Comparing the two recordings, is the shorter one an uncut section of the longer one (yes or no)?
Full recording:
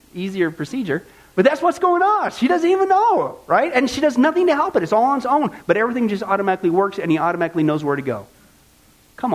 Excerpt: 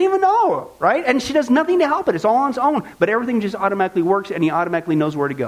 yes